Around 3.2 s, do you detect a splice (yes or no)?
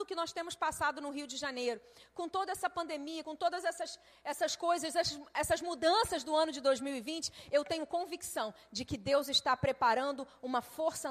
no